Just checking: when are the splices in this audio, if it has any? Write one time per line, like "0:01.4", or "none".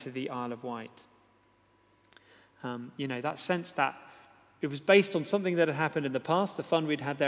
none